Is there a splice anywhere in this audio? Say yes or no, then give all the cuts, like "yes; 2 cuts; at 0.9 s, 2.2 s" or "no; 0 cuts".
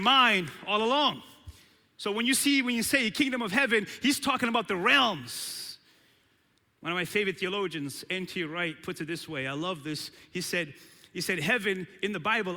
no; 0 cuts